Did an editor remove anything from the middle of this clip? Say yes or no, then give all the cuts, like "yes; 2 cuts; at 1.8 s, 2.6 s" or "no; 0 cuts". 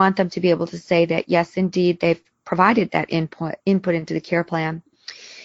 yes; 1 cut; at 3.6 s